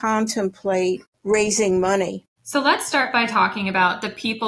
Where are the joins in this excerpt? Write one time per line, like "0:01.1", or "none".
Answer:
0:02.4